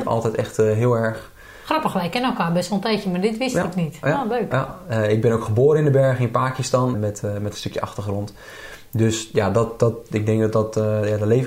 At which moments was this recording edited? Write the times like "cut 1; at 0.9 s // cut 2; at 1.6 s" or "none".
cut 1; at 6.9 s